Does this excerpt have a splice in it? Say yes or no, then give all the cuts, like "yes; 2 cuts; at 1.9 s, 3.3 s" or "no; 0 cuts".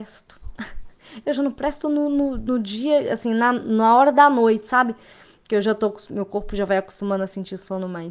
no; 0 cuts